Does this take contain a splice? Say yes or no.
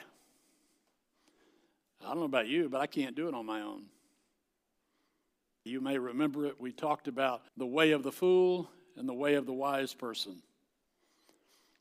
yes